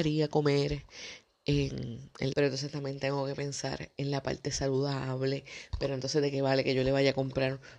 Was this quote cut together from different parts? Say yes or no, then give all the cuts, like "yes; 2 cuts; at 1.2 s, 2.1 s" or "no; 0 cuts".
yes; 1 cut; at 2.3 s